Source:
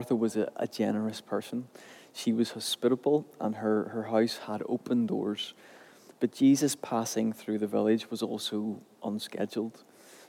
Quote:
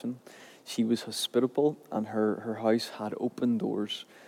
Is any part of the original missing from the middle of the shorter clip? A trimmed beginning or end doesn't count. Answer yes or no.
no